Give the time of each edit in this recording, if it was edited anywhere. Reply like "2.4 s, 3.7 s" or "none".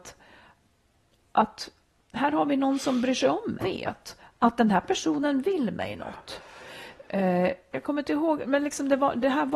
3.6 s, 7.7 s